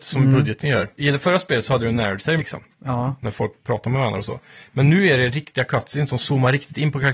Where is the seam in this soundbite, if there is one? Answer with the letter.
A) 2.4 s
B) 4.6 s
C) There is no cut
A